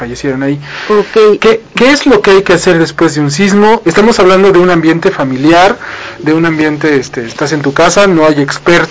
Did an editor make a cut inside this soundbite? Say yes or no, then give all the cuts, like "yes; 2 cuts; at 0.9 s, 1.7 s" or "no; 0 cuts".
yes; 1 cut; at 3.8 s